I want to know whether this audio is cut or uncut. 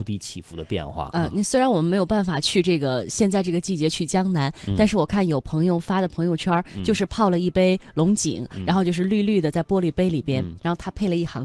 uncut